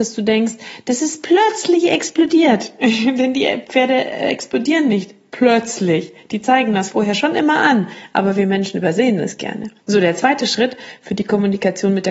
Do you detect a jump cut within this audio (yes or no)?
yes